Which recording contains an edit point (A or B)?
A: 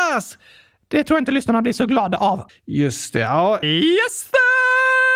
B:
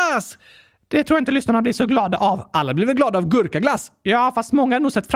A